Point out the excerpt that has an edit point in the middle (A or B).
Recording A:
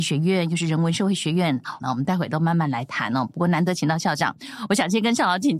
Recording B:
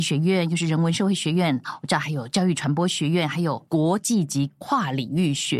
A